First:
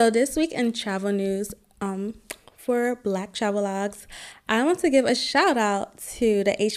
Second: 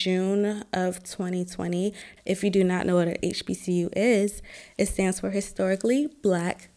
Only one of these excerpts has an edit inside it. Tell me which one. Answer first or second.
second